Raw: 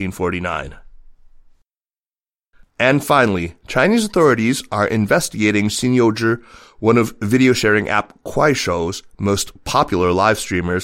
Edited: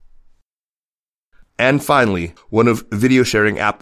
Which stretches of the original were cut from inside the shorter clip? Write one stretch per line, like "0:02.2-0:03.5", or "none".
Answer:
0:03.6-0:06.7